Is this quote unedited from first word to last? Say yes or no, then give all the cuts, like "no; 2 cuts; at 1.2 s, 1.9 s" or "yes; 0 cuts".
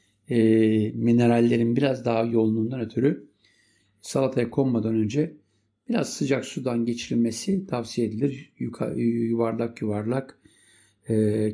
yes; 0 cuts